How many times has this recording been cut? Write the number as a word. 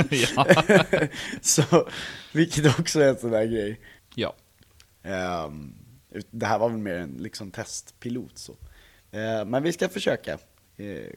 one